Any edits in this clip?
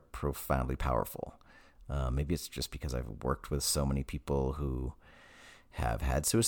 no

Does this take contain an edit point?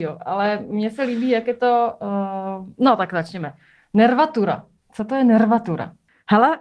no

